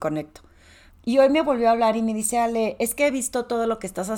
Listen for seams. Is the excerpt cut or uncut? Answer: cut